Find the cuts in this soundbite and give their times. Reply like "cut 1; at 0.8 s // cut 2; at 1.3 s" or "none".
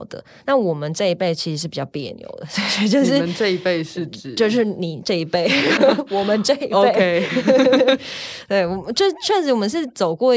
cut 1; at 5.8 s